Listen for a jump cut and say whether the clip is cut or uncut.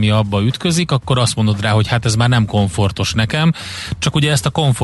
uncut